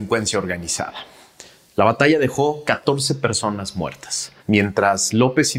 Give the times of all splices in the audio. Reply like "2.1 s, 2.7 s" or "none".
4.4 s